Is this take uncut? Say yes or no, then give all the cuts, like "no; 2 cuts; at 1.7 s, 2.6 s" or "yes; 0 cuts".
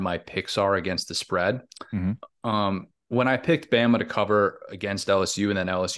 yes; 0 cuts